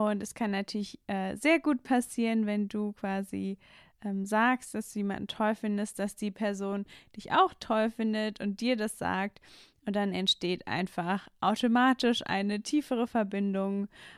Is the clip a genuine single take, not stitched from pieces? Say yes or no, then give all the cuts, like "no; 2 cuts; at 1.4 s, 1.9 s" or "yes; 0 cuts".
yes; 0 cuts